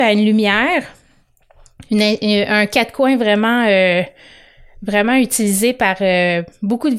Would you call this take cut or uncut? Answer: uncut